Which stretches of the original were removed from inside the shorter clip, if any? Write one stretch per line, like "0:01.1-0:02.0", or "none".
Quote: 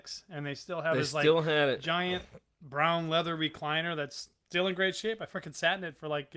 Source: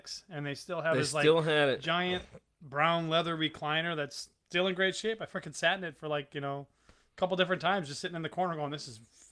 none

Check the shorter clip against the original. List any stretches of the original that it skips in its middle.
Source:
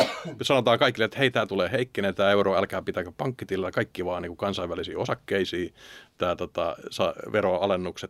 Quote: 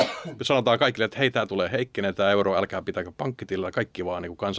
none

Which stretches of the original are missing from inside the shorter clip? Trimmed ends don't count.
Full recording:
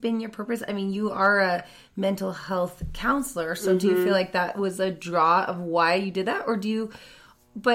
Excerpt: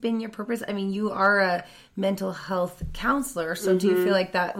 none

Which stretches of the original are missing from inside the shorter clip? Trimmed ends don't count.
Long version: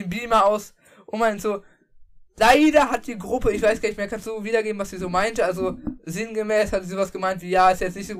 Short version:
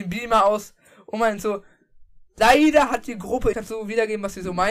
0:03.5-0:04.1

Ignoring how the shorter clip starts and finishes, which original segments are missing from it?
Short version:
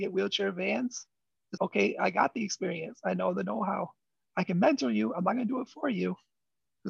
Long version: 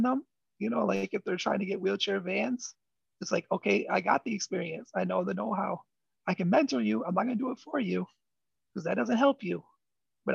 0:03.3-0:03.5

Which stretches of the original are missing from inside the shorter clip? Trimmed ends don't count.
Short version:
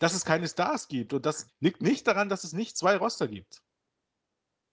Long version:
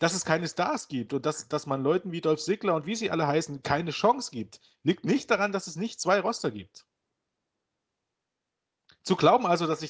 0:01.5-0:04.7

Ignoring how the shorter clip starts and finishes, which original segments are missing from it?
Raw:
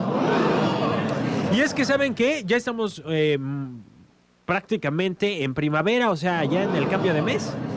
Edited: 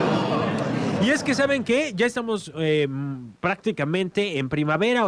0:03.9-0:04.4

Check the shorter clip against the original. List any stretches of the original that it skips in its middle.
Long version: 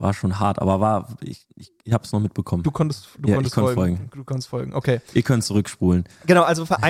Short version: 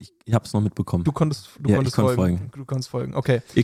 none

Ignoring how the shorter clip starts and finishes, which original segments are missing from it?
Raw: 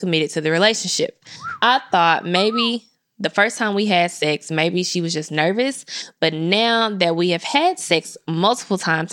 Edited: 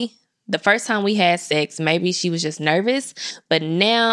none

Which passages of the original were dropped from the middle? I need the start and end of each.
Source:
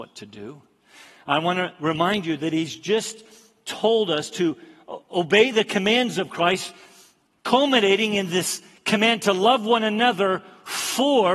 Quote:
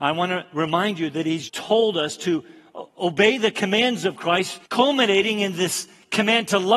0:02.7-0:03.6
0:06.8-0:07.4

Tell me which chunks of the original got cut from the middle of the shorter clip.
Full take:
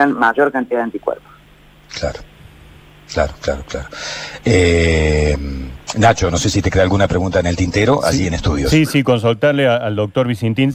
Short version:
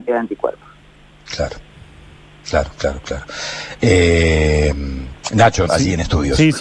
0:06.3-0:08.0

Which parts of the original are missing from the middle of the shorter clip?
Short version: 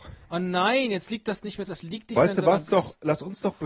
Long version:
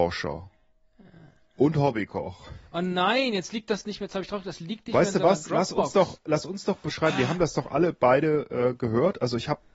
0:04.1-0:04.4
0:05.5-0:05.9

